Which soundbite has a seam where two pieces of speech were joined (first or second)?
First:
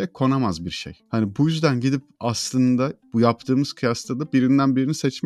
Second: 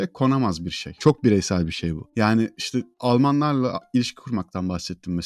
second